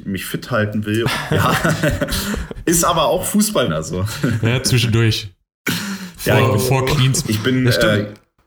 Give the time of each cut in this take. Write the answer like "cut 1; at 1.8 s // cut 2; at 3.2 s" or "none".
cut 1; at 1.0 s // cut 2; at 3.7 s // cut 3; at 7.2 s